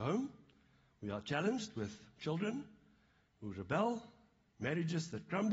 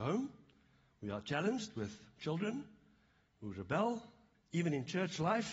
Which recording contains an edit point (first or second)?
second